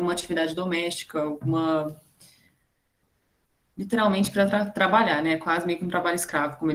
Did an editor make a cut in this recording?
no; 0 cuts

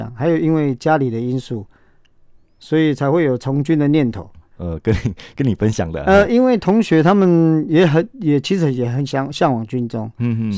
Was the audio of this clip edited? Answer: yes; 1 cut; at 4.5 s

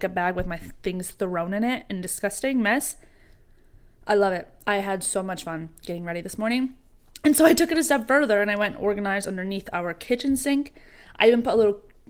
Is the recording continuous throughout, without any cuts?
yes; 0 cuts

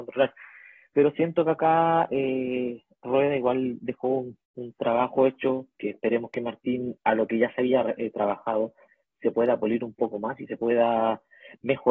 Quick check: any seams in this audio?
yes; 1 cut; at 4.4 s

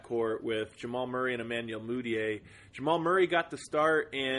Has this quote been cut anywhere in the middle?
no; 0 cuts

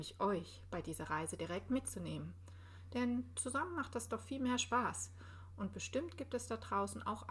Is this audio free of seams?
yes; 0 cuts

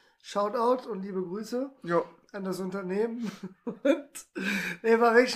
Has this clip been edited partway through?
no; 0 cuts

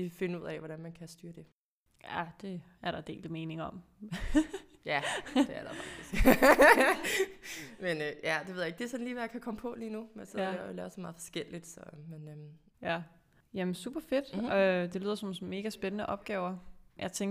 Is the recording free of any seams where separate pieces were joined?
no; 1 cut; at 12.7 s

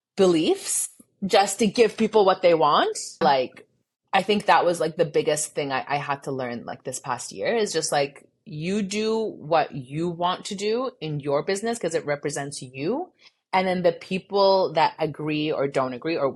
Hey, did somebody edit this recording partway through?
yes; 1 cut; at 3.2 s

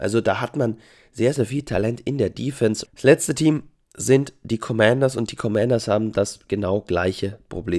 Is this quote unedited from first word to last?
no; 1 cut; at 2.9 s

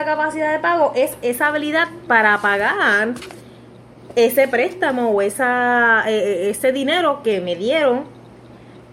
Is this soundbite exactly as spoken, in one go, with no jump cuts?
yes; 0 cuts

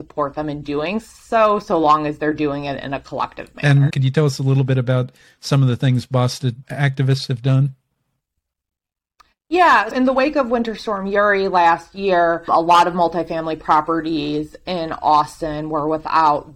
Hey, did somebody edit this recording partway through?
yes; 2 cuts; at 3.9 s, 9.9 s

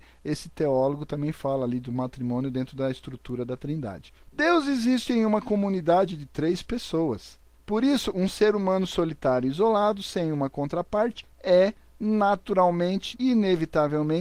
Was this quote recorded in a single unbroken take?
no; 1 cut; at 13.1 s

